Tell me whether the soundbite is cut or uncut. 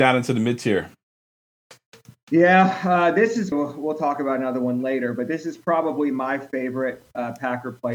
cut